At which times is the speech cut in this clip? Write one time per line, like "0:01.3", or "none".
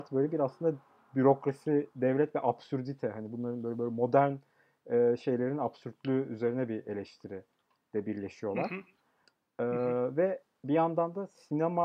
none